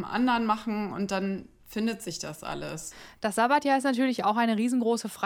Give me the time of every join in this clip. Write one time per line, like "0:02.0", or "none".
none